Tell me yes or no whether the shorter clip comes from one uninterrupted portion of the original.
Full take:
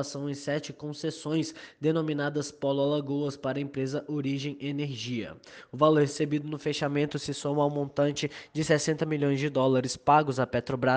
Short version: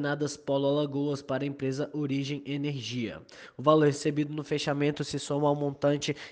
yes